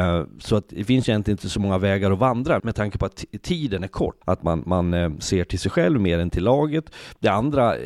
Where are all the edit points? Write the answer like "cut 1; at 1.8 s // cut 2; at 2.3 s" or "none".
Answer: cut 1; at 2.6 s // cut 2; at 4.2 s